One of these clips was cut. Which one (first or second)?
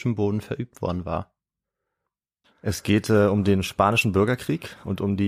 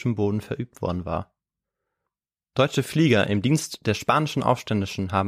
first